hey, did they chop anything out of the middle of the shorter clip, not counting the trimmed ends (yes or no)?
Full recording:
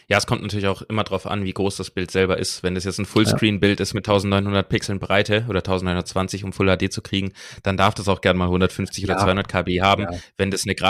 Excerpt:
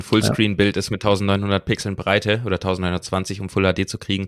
no